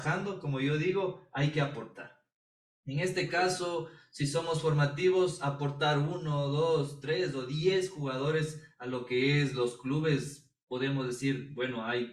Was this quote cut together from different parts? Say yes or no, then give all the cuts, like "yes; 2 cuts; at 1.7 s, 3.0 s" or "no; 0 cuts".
no; 0 cuts